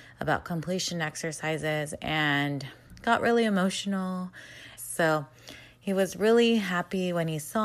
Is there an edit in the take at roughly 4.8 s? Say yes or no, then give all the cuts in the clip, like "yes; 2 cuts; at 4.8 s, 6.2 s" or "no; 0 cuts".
yes; 1 cut; at 4.8 s